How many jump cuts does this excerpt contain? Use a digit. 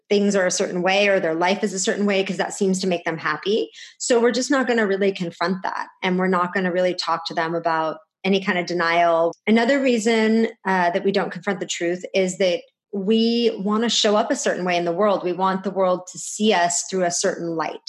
1